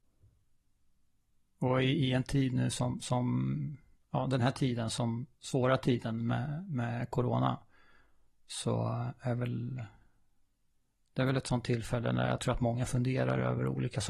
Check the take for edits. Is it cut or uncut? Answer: uncut